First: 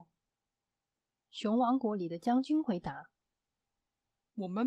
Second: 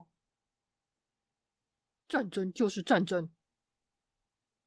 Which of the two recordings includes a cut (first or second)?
first